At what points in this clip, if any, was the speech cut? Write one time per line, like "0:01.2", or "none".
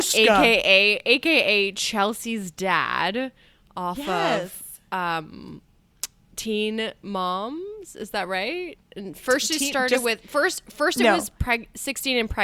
none